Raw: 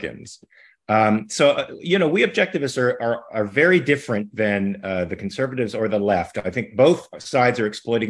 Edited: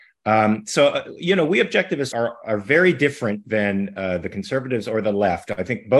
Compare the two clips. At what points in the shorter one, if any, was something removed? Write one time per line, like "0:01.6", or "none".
0:02.1